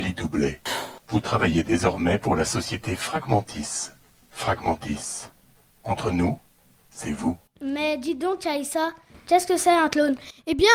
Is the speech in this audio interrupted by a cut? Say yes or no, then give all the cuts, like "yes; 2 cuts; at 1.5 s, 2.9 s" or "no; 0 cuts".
no; 0 cuts